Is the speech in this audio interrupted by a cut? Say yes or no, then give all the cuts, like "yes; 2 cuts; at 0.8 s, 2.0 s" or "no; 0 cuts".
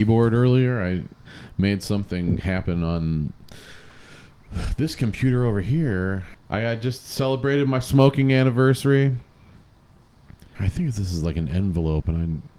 yes; 2 cuts; at 6.3 s, 10.5 s